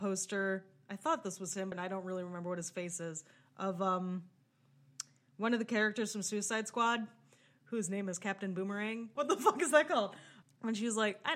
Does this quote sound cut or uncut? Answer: cut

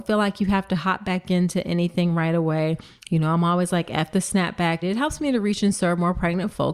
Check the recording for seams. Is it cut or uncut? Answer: cut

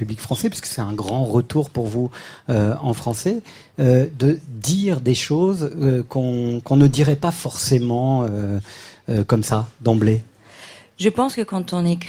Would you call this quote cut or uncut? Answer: uncut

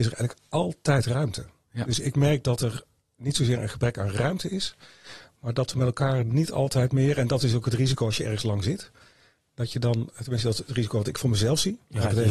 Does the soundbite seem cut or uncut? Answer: uncut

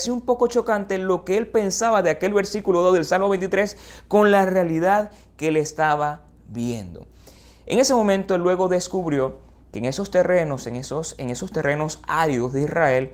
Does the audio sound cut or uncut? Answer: cut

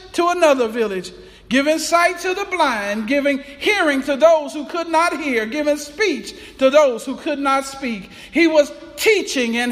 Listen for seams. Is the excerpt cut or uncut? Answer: uncut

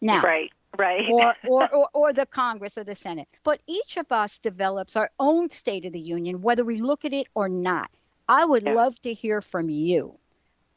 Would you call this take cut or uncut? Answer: cut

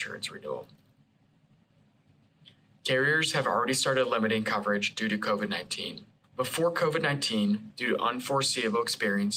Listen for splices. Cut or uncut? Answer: cut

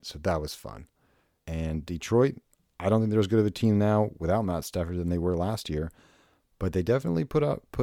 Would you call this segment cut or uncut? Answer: cut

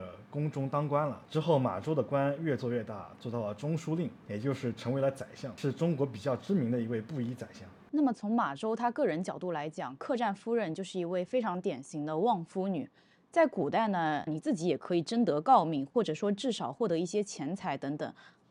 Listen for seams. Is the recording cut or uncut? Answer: cut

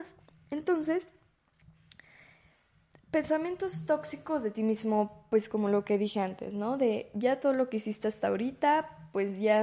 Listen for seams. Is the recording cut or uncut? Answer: uncut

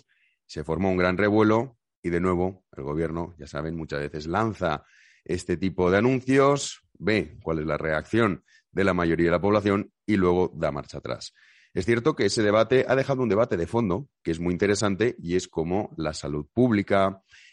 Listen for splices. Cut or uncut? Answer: uncut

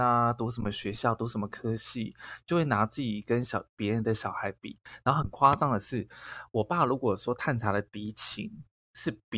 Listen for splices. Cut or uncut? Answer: uncut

